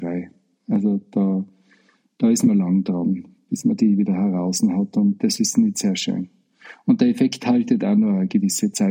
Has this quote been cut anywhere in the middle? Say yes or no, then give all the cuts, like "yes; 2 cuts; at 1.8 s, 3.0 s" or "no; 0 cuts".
no; 0 cuts